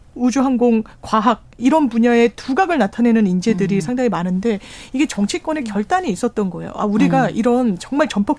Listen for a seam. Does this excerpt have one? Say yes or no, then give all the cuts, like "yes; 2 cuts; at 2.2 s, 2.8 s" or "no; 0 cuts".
no; 0 cuts